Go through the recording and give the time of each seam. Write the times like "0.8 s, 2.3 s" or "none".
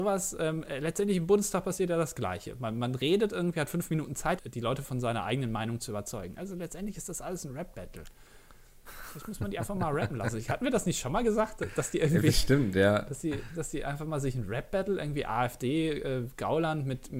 4.4 s